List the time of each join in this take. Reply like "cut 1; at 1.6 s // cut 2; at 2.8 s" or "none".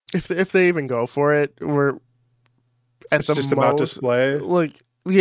none